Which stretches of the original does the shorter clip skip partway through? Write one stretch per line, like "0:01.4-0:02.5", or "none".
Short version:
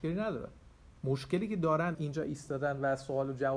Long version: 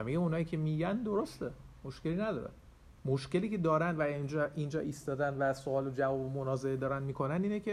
0:04.0-0:04.5